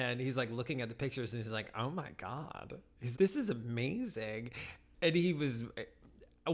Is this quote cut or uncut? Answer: cut